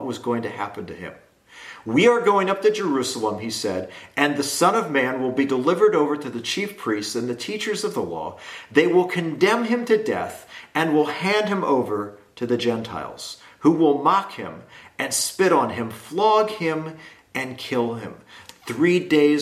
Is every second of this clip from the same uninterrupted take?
yes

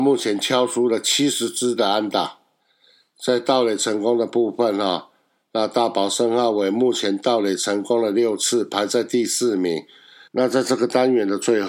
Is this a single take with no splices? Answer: no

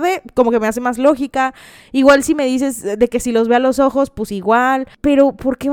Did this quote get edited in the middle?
no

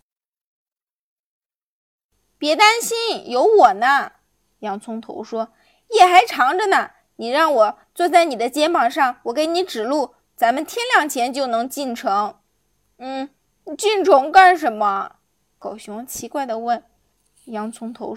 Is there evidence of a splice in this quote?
yes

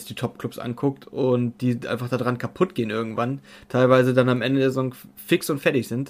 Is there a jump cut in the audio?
no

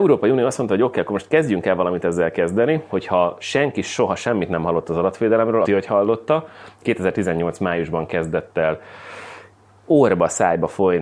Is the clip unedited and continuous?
no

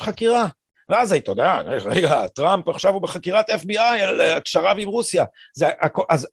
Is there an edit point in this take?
no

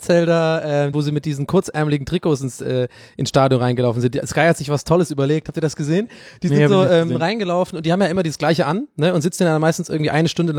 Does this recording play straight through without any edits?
no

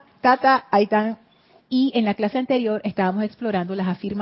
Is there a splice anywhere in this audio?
yes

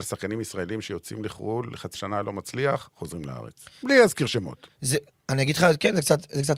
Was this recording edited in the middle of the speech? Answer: yes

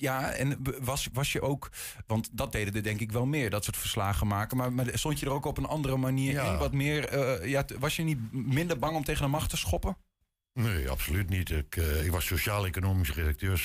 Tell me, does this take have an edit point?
no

